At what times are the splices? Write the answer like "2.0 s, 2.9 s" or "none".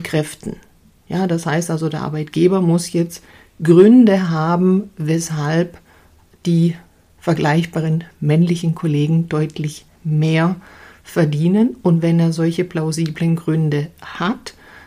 none